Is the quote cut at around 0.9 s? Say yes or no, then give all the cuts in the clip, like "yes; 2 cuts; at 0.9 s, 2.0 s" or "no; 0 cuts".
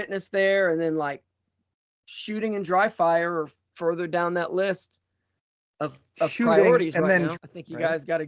no; 1 cut; at 7.4 s